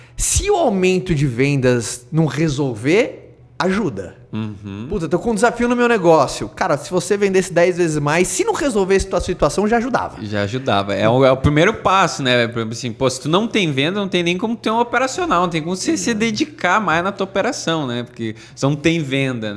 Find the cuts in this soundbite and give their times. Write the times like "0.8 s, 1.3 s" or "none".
none